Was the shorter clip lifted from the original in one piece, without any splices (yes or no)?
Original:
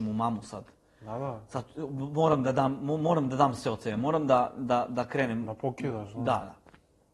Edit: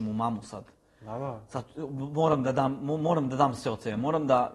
yes